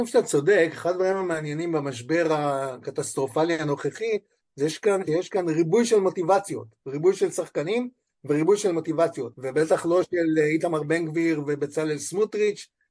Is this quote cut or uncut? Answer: cut